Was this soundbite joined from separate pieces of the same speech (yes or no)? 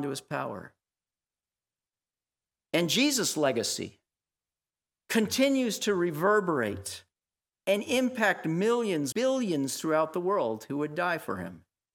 yes